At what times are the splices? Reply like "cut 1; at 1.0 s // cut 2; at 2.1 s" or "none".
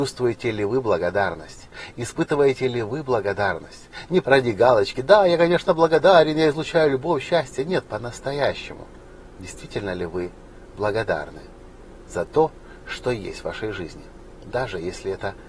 cut 1; at 4.2 s